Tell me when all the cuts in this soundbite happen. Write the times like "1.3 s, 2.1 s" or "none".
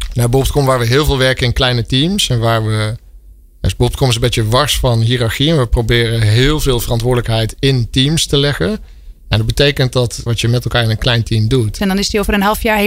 10.3 s, 11.8 s